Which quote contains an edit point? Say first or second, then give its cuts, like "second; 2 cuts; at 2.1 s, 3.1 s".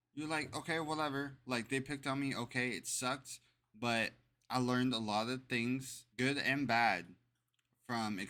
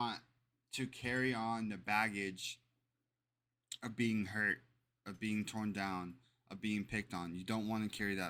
first; 1 cut; at 6.1 s